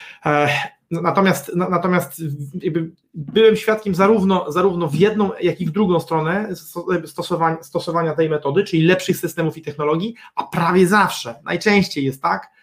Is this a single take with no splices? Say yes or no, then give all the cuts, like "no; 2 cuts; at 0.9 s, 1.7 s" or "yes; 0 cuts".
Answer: yes; 0 cuts